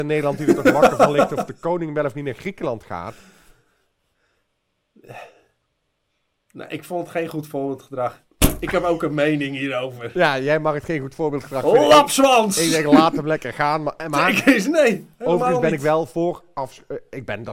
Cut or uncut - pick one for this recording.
uncut